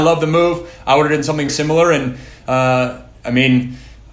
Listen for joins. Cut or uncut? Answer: cut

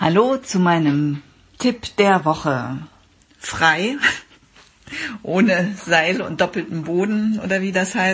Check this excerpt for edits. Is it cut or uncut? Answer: cut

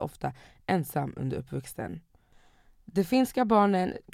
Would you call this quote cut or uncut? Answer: uncut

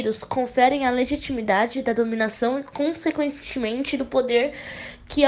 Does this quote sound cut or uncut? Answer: uncut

